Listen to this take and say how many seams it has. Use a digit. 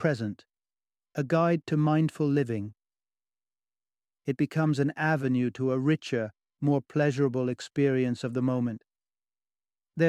1